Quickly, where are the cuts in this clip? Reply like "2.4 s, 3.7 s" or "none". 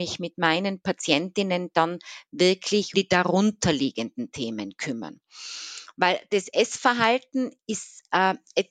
2.9 s